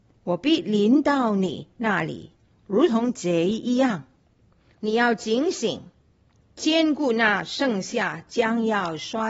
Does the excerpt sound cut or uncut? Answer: cut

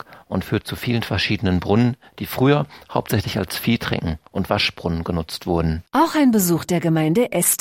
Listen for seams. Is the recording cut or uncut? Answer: uncut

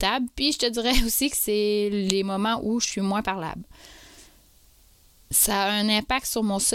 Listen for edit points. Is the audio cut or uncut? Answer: uncut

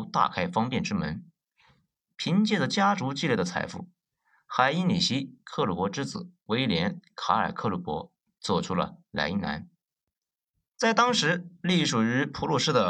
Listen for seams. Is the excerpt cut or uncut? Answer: uncut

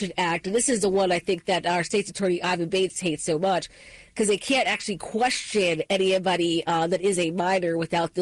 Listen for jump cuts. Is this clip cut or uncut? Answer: uncut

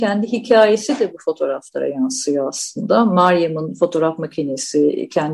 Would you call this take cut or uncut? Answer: uncut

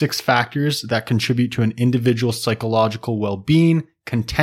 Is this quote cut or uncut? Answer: uncut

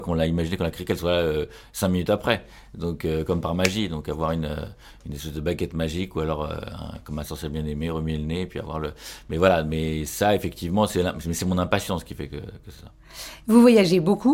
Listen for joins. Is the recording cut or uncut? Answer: uncut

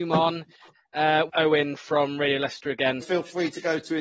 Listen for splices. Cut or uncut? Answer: cut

